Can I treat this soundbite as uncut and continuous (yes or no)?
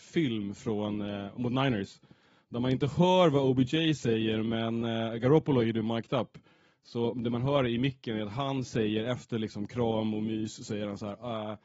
yes